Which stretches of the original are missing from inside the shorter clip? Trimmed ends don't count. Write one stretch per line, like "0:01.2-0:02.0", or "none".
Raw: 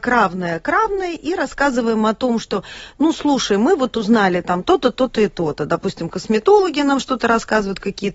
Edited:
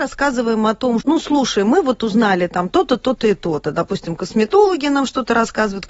0:02.4-0:02.9